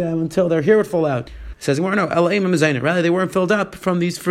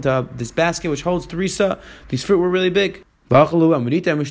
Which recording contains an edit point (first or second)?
first